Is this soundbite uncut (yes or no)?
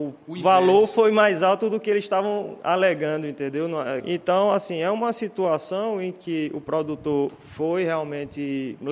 no